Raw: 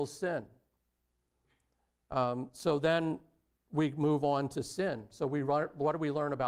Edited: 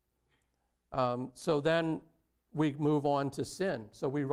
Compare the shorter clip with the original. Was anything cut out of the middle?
no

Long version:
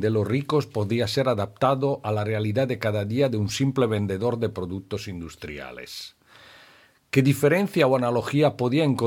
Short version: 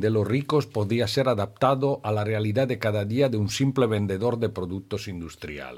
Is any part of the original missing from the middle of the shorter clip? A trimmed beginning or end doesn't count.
no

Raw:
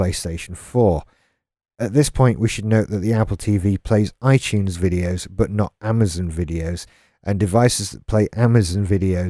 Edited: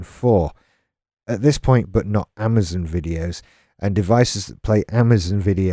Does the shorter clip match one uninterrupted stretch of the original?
no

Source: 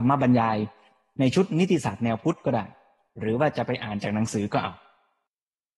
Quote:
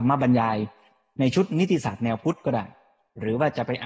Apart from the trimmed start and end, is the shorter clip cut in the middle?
no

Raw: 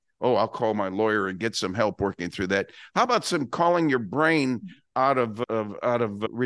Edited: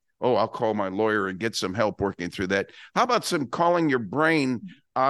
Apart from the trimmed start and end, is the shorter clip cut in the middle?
no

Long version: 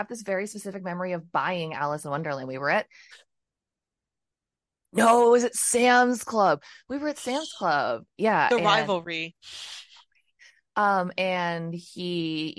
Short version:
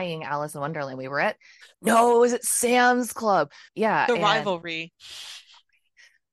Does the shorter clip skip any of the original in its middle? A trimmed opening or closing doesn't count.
yes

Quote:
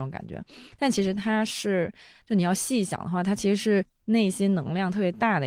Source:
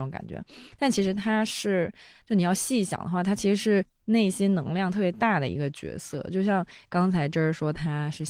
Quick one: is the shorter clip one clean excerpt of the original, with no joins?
yes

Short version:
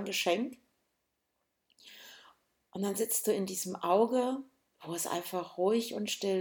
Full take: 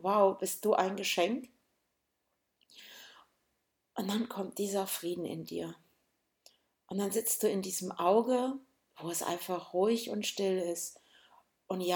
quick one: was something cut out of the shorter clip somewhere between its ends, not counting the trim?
yes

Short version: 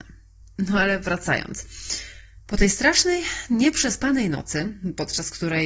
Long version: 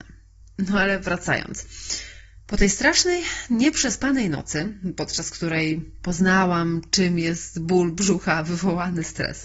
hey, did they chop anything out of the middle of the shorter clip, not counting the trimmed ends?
no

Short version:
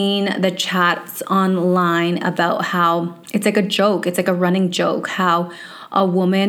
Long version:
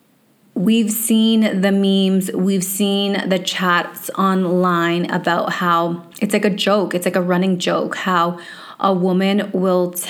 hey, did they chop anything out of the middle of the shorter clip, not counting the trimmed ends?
no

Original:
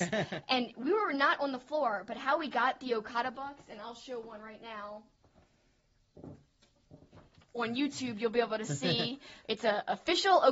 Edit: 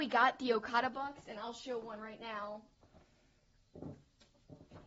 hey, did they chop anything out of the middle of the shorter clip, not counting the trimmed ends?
no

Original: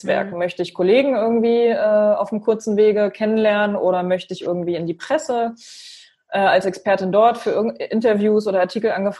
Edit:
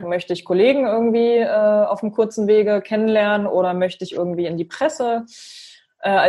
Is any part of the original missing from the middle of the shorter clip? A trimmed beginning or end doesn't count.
no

